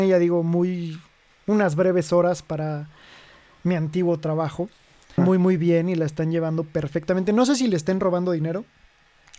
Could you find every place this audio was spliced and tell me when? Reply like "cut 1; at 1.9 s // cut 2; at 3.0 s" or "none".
cut 1; at 5.2 s